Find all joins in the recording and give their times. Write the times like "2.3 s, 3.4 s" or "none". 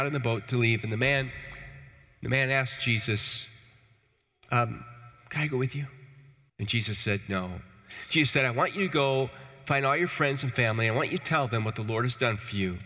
6.5 s